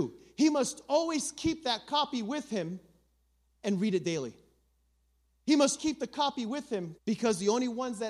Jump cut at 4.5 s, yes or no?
no